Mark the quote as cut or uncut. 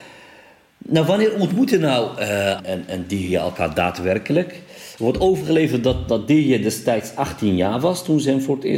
cut